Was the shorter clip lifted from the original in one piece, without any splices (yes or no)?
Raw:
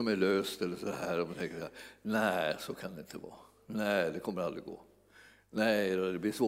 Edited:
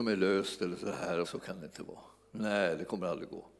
no